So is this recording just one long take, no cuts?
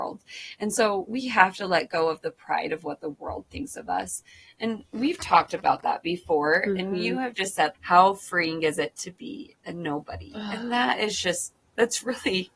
no; 1 cut; at 7.7 s

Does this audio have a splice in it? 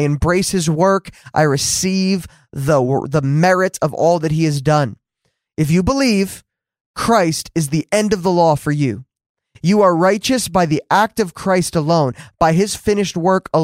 yes; 1 cut; at 5.5 s

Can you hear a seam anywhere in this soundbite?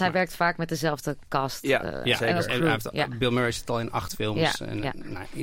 no; 0 cuts

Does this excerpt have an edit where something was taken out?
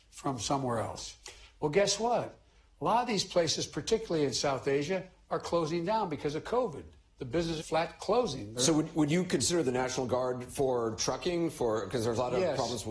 yes; 1 cut; at 7.6 s

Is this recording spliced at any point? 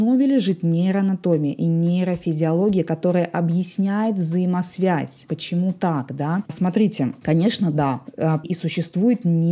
yes; 2 cuts; at 6.5 s, 8.4 s

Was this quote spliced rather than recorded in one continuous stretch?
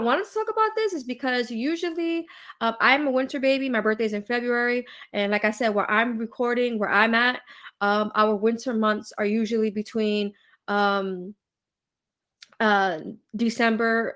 no; 0 cuts

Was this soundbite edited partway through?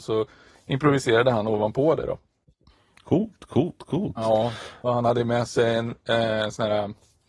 no; 0 cuts

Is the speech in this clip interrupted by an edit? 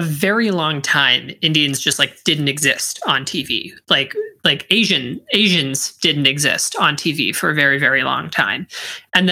no; 0 cuts

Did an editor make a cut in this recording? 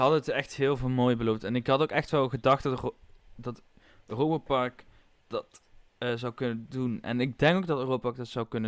no; 0 cuts

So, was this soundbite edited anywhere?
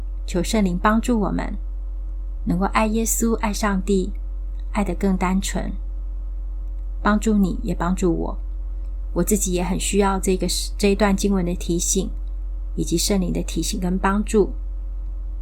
no; 0 cuts

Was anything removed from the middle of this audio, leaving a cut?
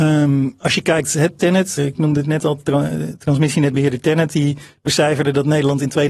yes; 1 cut; at 1.8 s

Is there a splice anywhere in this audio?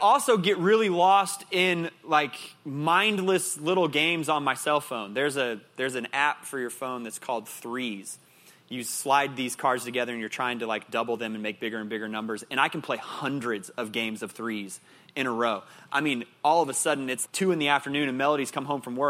yes; 1 cut; at 17.2 s

